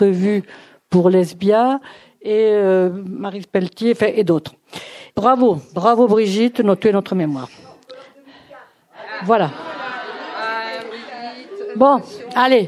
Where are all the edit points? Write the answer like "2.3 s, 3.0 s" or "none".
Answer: 5.1 s

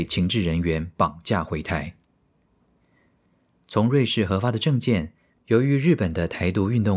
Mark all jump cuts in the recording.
5.3 s

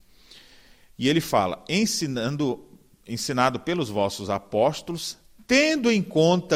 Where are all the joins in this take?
none

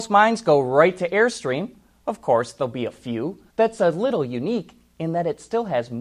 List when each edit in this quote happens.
3.5 s

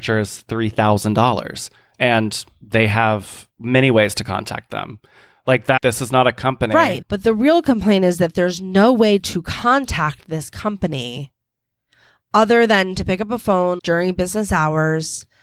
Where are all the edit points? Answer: 5.8 s, 7.0 s, 13.8 s

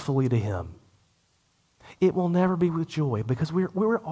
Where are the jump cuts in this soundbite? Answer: none

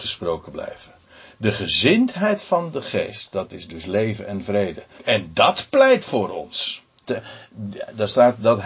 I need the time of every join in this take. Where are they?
5.0 s

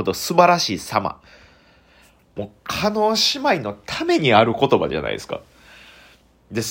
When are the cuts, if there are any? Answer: none

